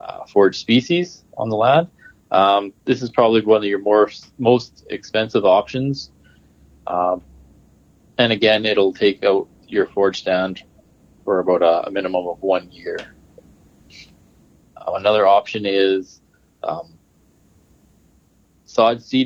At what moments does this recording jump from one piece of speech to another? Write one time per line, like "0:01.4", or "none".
none